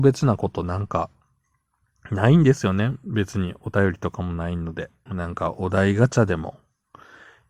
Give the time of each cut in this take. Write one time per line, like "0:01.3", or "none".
0:05.1